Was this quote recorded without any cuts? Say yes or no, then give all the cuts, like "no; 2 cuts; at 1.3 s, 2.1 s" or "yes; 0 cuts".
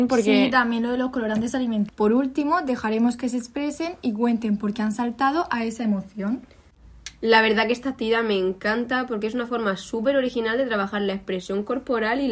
no; 1 cut; at 1.9 s